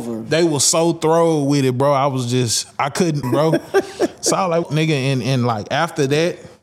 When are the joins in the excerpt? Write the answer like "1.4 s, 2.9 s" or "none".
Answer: 3.2 s, 4.6 s